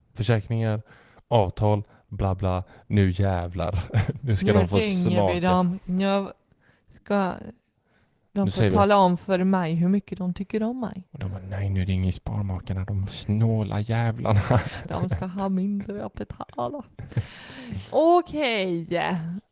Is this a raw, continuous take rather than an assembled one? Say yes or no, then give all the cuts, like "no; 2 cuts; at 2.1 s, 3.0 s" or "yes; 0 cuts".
yes; 0 cuts